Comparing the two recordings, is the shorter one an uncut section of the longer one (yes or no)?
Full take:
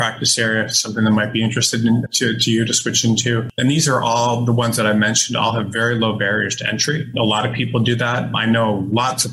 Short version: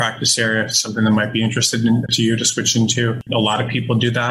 no